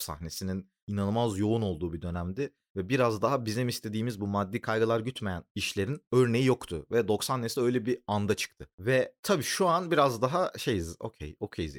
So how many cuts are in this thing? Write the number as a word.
zero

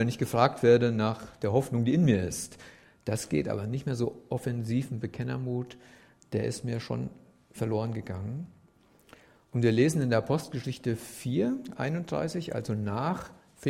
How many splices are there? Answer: zero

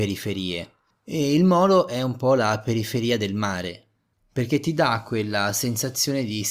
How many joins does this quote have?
two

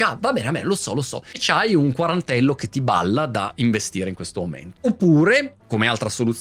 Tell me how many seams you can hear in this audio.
one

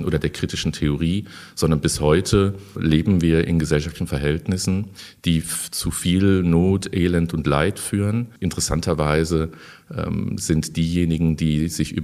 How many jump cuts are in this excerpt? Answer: one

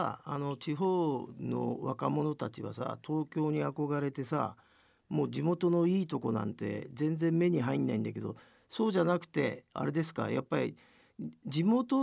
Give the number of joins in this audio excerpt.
zero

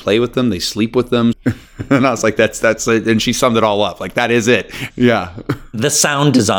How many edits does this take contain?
two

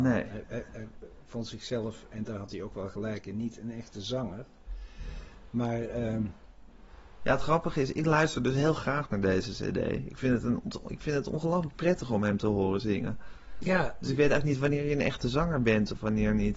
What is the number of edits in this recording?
zero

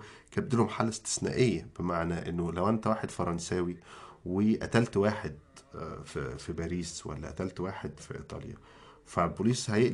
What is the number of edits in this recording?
one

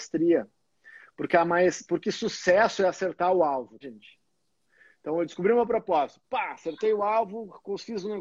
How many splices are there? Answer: one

